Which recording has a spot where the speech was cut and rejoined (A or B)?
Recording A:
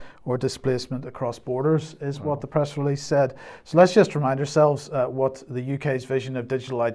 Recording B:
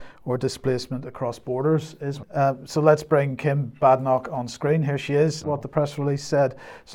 B